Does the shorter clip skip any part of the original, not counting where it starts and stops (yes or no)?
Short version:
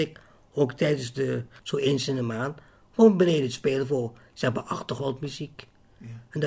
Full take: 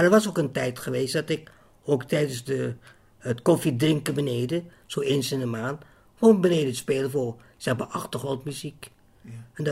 yes